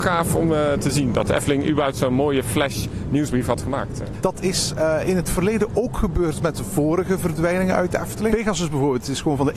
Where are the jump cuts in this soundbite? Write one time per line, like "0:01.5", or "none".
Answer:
0:04.1
0:08.3

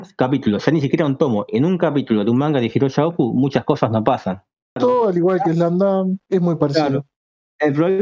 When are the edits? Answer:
0:04.8
0:06.3

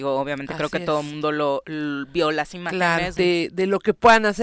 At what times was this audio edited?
0:03.2

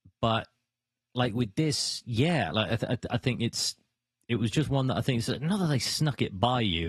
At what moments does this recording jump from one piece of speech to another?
none

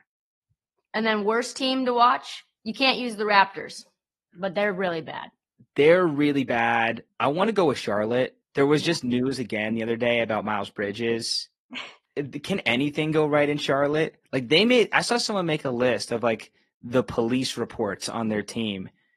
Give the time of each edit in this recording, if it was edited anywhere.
none

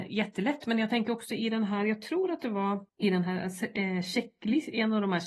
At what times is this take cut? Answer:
0:02.9

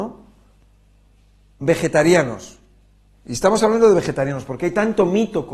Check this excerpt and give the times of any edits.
none

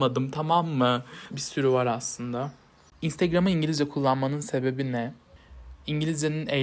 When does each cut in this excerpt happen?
0:01.3

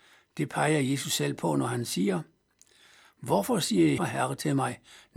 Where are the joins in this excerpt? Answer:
0:04.0

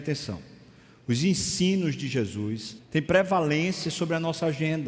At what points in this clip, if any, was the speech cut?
0:02.8

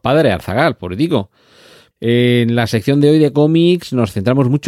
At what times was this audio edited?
0:01.9

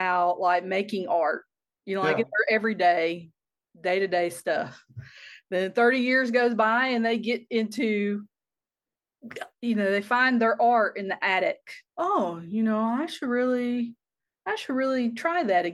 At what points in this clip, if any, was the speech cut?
0:11.9

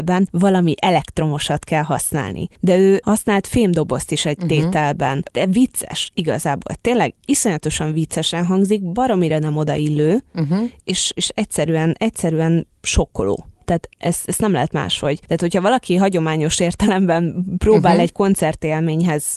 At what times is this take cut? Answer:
0:05.3

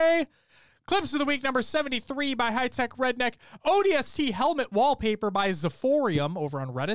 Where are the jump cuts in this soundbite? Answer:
none

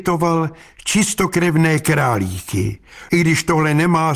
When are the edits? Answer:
0:03.1

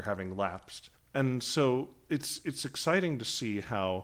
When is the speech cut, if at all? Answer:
0:00.9

